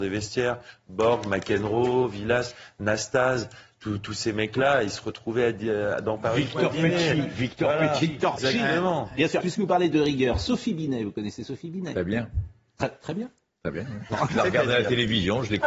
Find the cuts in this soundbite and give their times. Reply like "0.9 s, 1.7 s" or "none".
8.4 s, 9.4 s, 14.3 s